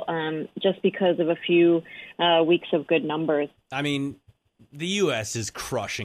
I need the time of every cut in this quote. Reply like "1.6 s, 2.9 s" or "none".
3.6 s